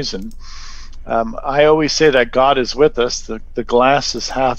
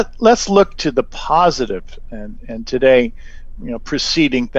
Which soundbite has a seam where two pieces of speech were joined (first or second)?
second